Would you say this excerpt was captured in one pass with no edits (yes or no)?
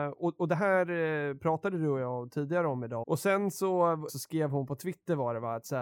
no